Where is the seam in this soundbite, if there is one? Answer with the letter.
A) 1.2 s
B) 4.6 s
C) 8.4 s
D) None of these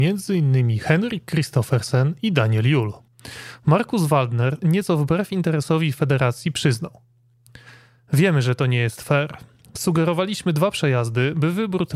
B